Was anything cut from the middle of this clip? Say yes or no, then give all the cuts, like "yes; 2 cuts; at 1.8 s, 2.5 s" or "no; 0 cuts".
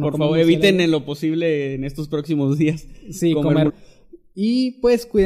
yes; 1 cut; at 3.7 s